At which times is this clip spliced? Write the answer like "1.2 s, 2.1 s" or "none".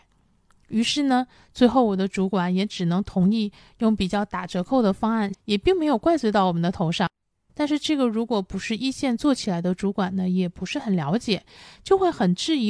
5.3 s, 7.5 s